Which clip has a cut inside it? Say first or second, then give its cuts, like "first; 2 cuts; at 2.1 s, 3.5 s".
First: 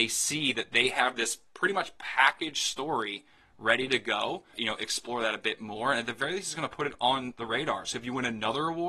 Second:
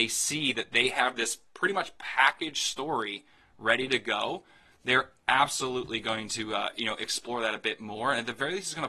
first; 1 cut; at 4.5 s